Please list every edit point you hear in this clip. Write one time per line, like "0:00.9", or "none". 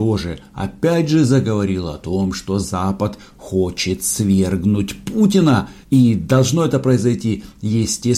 0:05.8